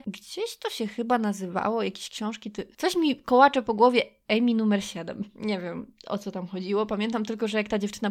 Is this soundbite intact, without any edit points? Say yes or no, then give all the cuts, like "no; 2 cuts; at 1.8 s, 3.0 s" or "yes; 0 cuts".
yes; 0 cuts